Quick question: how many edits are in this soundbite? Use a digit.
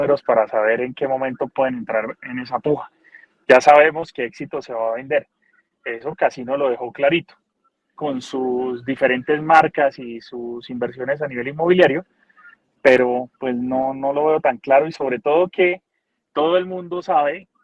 1